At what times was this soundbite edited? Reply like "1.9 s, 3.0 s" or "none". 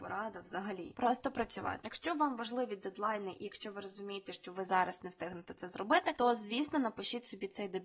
1.8 s